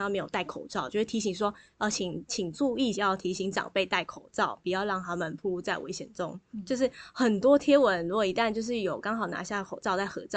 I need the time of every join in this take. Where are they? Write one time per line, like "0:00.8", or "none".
0:02.9